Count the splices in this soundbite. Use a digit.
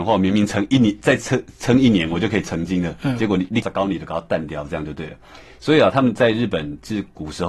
1